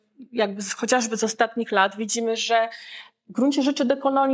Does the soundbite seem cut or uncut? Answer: uncut